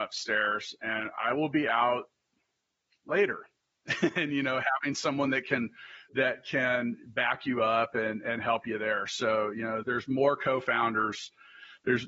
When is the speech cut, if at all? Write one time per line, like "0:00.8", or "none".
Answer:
0:09.8